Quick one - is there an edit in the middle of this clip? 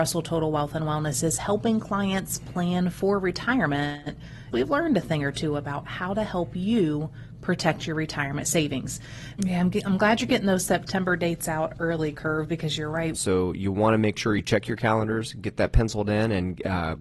yes; 3 cuts; at 4.5 s, 9.4 s, 13.1 s

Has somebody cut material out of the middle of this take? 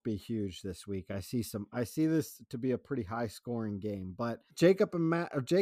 yes; 1 cut; at 4.5 s

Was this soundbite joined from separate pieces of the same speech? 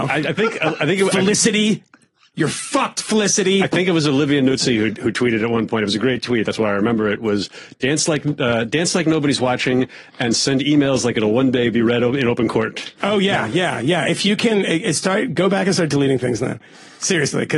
no; 0 cuts

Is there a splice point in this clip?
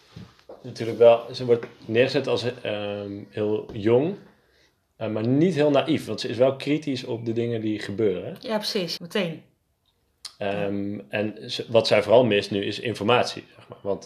yes; 1 cut; at 9.0 s

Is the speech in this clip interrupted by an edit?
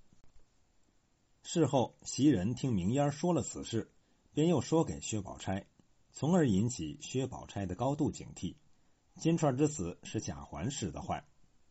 yes; 1 cut; at 9.1 s

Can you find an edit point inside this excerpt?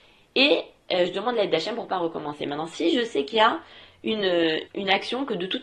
yes; 1 cut; at 4.7 s

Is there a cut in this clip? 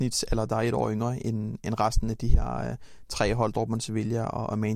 no; 0 cuts

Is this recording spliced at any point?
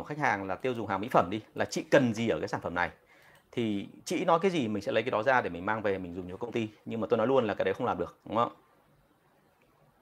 yes; 1 cut; at 8.2 s

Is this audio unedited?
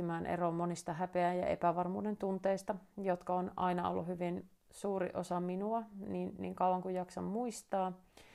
yes; 0 cuts

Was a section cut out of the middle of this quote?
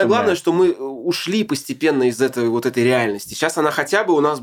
no; 0 cuts

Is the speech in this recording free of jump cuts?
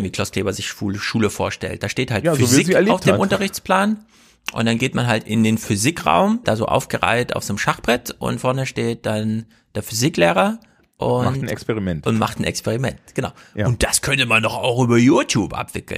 no; 1 cut; at 6.4 s

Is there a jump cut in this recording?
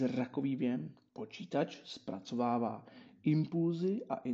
yes; 1 cut; at 1.1 s

